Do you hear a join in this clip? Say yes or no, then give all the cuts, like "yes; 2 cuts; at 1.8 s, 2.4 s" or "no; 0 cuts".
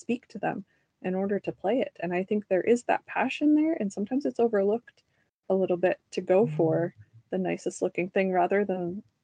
no; 0 cuts